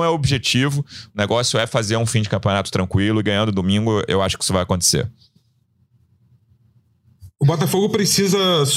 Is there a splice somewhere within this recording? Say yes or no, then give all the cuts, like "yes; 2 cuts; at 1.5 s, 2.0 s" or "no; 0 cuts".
no; 0 cuts